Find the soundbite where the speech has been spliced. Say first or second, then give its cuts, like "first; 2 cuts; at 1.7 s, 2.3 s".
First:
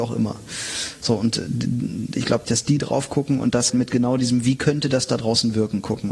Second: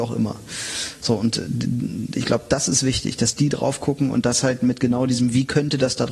first; 2 cuts; at 2.4 s, 3.7 s